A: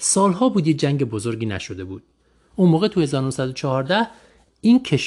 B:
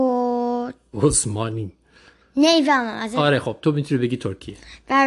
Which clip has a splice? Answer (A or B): B